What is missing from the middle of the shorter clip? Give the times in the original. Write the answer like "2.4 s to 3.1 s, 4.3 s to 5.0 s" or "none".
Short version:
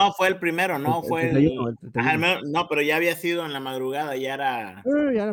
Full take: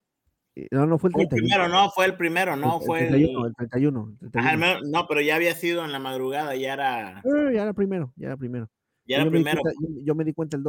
3.6 s to 4.2 s